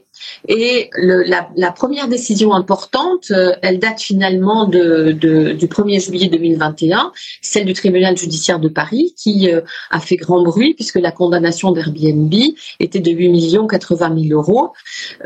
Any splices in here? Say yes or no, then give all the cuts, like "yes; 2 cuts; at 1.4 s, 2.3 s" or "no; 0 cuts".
no; 0 cuts